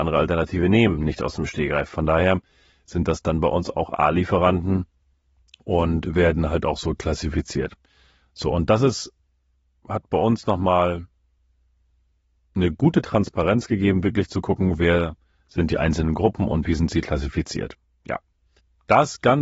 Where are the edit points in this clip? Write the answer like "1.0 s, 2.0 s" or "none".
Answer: none